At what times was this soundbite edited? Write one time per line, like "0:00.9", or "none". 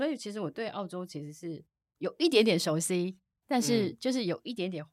none